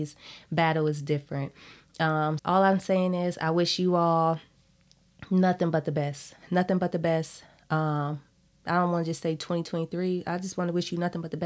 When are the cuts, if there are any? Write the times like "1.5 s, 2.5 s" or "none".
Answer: 2.4 s